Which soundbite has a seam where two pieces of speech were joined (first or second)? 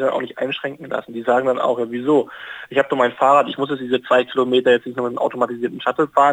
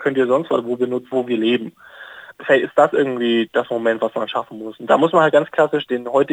second